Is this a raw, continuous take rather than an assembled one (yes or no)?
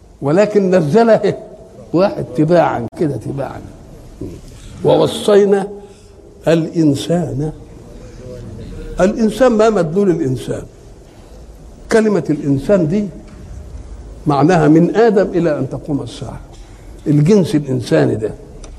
yes